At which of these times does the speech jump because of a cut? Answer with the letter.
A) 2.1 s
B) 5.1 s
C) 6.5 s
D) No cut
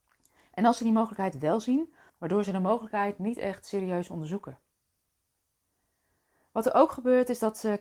A